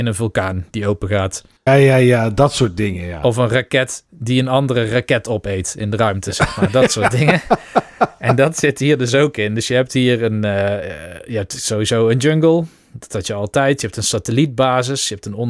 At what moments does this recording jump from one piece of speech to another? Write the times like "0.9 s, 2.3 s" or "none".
1.7 s